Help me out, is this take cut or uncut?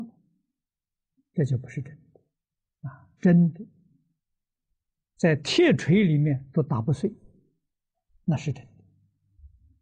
uncut